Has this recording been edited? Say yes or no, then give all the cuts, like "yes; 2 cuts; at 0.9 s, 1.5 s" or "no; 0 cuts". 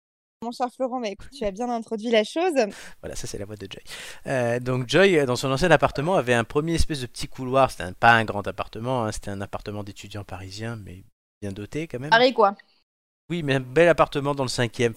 no; 0 cuts